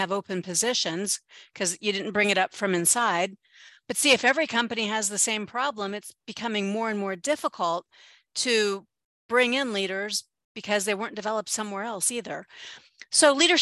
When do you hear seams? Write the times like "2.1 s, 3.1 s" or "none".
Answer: none